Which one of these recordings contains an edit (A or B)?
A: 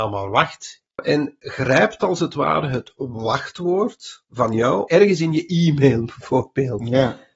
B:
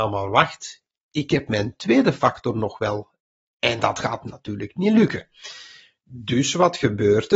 A